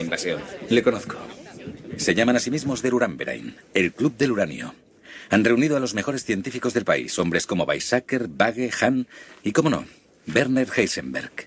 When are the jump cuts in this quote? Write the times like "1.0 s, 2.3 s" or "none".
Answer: 1.9 s